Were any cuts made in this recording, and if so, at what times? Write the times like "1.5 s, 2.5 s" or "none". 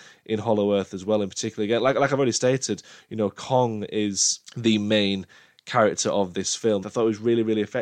6.8 s